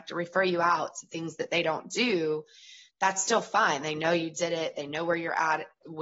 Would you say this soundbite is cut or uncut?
uncut